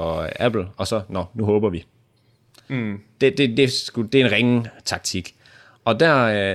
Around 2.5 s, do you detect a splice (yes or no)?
no